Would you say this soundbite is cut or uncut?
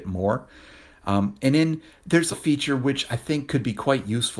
cut